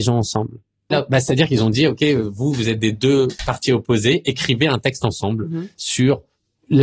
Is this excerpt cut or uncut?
cut